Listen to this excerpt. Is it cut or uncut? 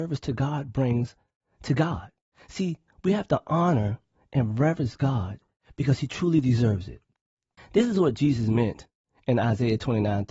uncut